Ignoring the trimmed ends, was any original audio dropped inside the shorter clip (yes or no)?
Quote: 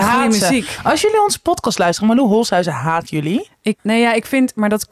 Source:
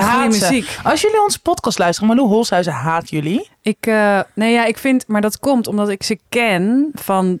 yes